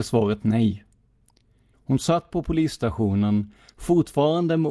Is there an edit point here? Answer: yes; 1 cut; at 1.7 s

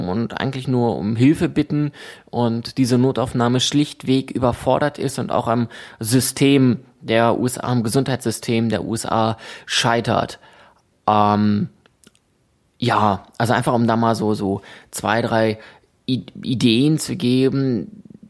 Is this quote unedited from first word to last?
yes; 0 cuts

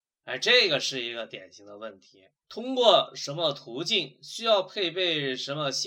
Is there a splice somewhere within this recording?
yes; 1 cut; at 2.4 s

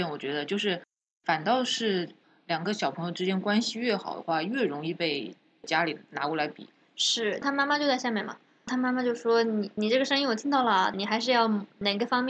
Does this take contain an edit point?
yes; 2 cuts; at 7.4 s, 10.9 s

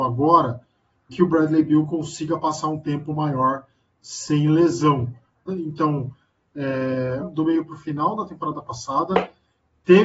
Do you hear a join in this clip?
yes; 3 cuts; at 1.1 s, 5.5 s, 7.2 s

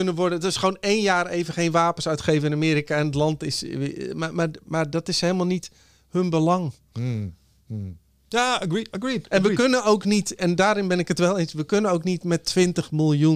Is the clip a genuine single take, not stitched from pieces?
yes; 0 cuts

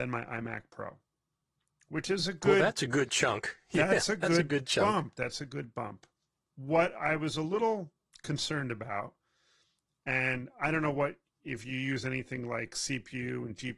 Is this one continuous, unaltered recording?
yes; 0 cuts

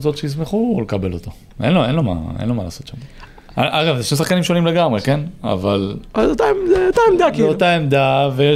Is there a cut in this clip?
no; 0 cuts

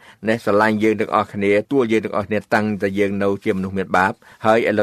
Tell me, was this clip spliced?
yes; 1 cut; at 1.6 s

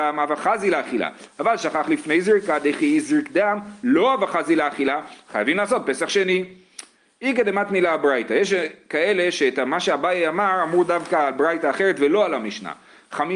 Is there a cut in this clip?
no; 0 cuts

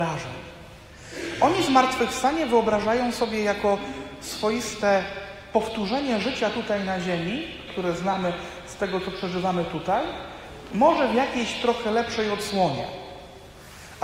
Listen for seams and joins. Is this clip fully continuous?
no; 1 cut; at 7.7 s

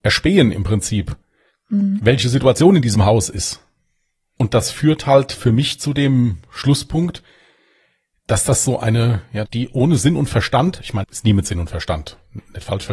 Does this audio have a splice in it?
yes; 2 cuts; at 9.4 s, 11.0 s

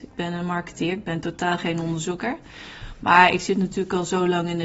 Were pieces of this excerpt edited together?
no; 0 cuts

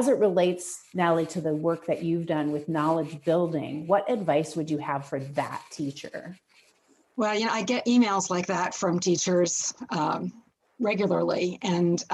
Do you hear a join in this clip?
no; 0 cuts

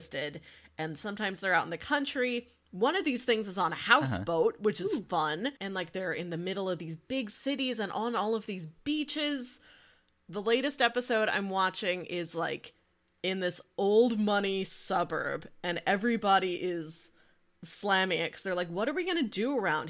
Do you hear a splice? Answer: yes; 1 cut; at 5.6 s

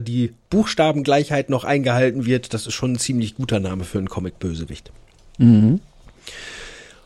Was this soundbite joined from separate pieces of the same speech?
no; 0 cuts

